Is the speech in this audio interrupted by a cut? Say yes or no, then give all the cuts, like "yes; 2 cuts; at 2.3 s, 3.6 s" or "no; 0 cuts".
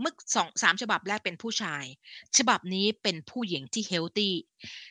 no; 0 cuts